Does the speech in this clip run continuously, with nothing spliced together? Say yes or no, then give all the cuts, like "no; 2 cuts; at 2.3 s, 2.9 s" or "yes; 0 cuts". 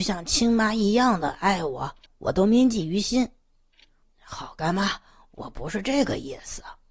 no; 2 cuts; at 2.1 s, 4.0 s